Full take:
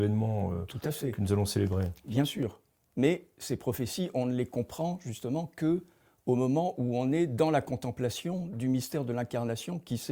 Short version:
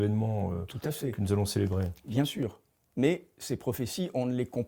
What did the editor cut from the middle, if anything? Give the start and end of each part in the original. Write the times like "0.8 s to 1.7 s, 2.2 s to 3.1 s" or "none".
none